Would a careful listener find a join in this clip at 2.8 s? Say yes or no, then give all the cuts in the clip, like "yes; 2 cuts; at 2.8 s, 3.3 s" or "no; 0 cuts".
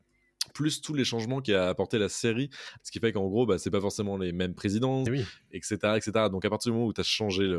yes; 2 cuts; at 2.8 s, 5.1 s